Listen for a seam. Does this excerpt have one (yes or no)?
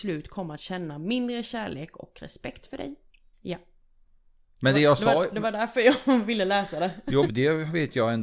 yes